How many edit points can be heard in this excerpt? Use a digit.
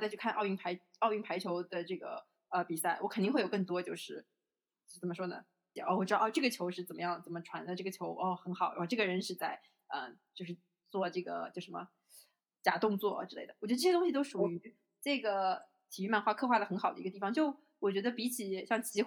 1